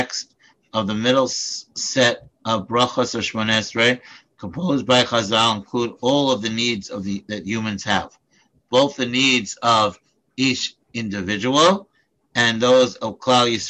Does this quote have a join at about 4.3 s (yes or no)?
no